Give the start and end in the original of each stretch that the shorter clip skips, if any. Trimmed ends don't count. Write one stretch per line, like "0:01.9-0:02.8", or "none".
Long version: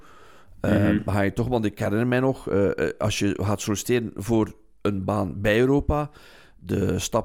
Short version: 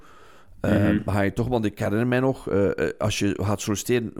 none